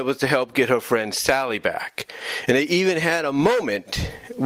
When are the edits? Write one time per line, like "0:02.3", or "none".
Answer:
none